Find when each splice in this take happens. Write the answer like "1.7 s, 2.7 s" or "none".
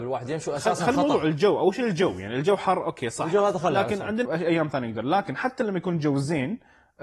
4.2 s